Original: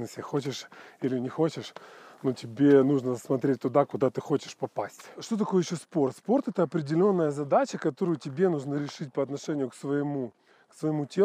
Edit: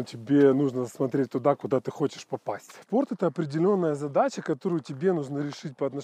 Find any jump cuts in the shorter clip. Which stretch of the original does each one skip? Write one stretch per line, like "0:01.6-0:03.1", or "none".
0:05.1-0:06.2